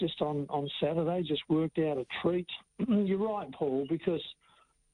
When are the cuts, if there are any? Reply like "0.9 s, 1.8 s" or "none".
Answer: 2.7 s